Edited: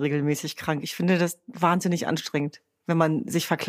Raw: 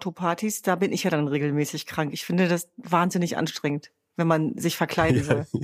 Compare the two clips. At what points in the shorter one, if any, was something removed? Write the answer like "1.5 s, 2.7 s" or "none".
none